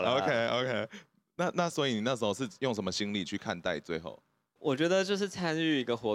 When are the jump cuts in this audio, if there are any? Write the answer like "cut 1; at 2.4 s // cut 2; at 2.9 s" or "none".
cut 1; at 4.6 s

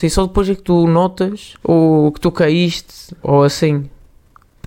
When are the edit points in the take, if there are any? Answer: cut 1; at 1.6 s // cut 2; at 3.2 s

